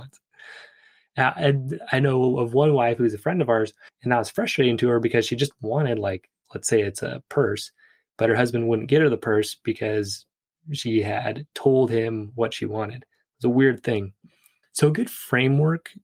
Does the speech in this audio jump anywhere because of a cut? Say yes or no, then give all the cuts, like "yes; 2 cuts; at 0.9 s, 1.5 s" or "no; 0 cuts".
yes; 2 cuts; at 3.9 s, 14.6 s